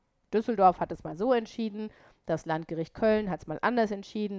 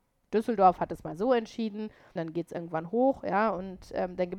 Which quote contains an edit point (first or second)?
second